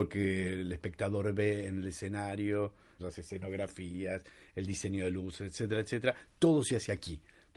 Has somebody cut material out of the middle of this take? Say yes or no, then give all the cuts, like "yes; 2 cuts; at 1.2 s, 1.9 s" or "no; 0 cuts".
yes; 1 cut; at 3.0 s